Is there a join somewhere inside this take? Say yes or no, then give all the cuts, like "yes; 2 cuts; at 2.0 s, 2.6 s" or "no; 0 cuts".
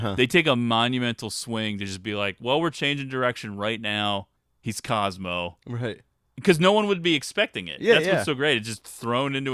no; 0 cuts